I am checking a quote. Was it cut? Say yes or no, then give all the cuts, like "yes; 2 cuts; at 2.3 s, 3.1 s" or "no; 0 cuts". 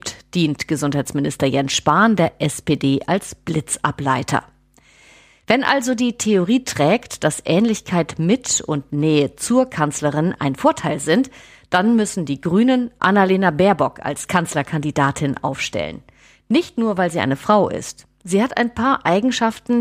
no; 0 cuts